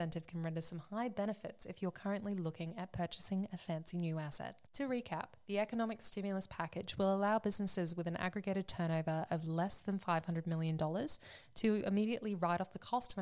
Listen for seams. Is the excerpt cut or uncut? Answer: cut